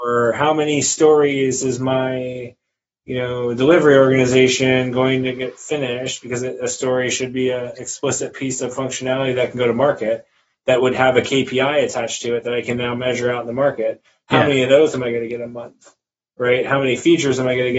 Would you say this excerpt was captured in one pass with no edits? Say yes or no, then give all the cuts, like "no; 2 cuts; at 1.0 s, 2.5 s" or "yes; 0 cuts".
yes; 0 cuts